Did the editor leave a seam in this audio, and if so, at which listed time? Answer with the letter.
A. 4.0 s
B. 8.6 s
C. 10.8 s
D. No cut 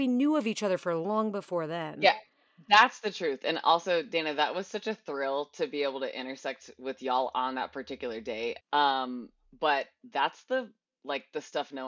B